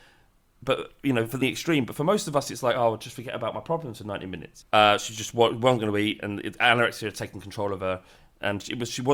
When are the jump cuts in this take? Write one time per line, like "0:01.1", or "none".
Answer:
0:01.4
0:04.6